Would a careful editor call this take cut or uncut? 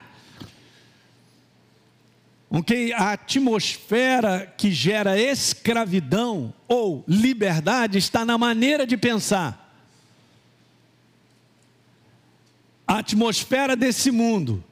uncut